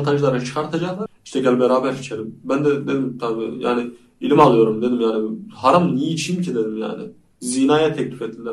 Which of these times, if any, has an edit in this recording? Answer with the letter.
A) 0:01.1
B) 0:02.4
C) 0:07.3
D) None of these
A